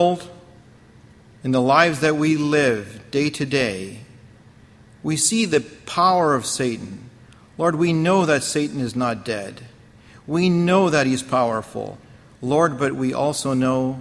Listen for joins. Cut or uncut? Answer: uncut